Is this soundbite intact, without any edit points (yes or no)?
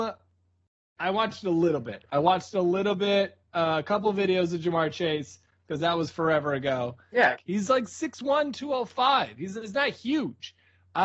no